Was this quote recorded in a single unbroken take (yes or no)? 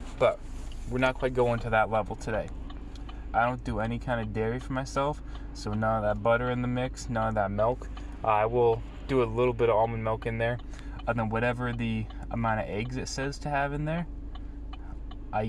no